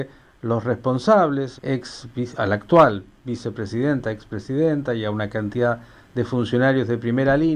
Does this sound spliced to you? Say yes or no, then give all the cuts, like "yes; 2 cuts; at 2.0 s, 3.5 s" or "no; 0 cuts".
yes; 1 cut; at 1.6 s